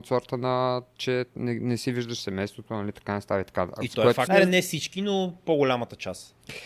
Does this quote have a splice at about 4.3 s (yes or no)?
yes